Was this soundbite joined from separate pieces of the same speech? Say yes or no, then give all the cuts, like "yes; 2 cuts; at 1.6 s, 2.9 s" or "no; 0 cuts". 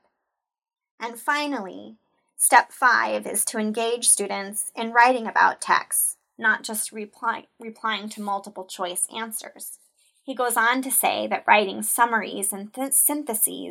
no; 0 cuts